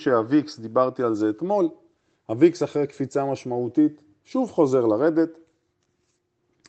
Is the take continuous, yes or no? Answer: yes